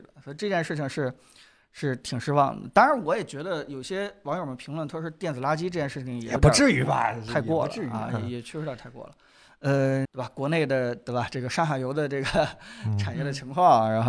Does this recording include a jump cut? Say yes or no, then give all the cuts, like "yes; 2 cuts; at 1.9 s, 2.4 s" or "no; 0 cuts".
yes; 1 cut; at 10.0 s